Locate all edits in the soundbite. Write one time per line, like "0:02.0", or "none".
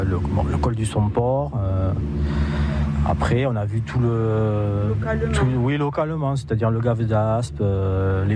none